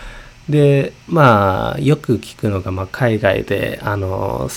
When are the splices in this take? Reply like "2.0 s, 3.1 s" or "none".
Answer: 1.0 s